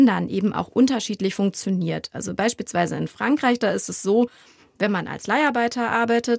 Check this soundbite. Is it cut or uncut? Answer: uncut